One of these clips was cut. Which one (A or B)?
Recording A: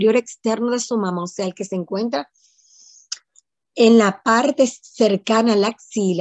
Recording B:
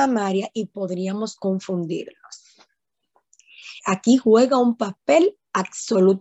B